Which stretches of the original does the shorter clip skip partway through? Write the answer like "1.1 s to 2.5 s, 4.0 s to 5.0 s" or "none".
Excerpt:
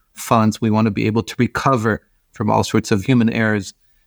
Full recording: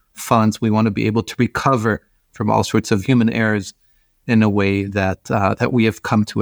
none